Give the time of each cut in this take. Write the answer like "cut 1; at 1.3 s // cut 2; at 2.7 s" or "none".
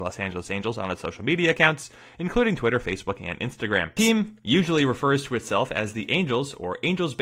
cut 1; at 4.0 s